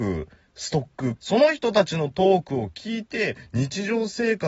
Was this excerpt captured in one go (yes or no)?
no